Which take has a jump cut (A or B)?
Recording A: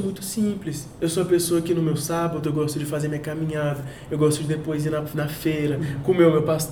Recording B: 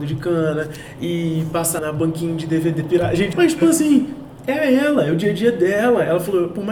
B